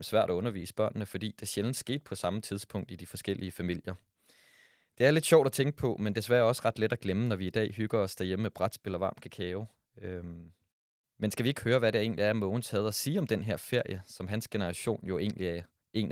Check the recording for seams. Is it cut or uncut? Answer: uncut